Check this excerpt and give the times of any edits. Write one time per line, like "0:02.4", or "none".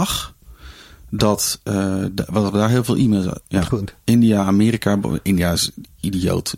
0:03.4